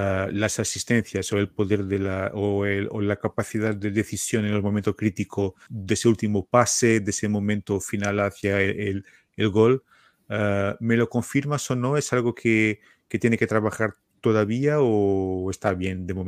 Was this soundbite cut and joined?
yes; 1 cut; at 5.7 s

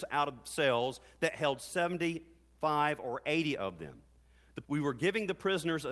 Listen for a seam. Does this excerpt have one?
yes; 1 cut; at 4.6 s

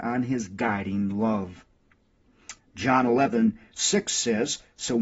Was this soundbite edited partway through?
yes; 1 cut; at 2.6 s

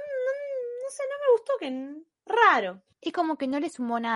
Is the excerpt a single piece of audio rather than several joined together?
yes; 0 cuts

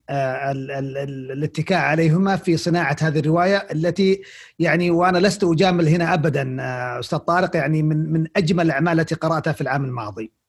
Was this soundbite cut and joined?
no; 0 cuts

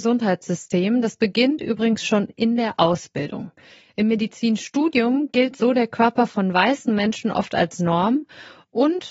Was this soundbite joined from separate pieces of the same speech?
no; 0 cuts

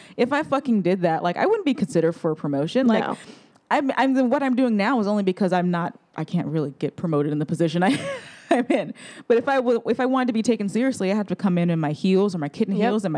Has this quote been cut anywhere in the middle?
no; 0 cuts

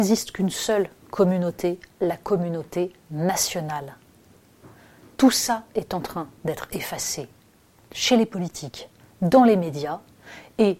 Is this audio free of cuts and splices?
yes; 0 cuts

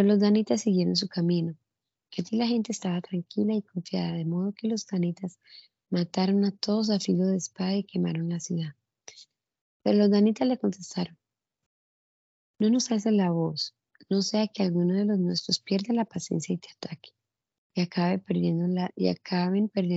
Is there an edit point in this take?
yes; 2 cuts; at 2.0 s, 9.6 s

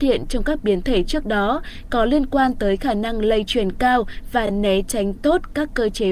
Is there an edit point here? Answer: no; 0 cuts

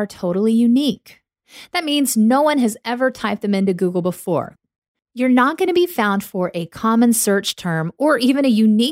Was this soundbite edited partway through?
no; 0 cuts

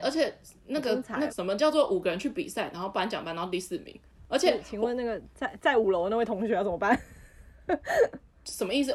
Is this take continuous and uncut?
no; 2 cuts; at 1.3 s, 4.1 s

